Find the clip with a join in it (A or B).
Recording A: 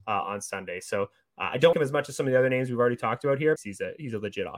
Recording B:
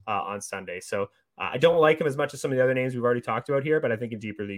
A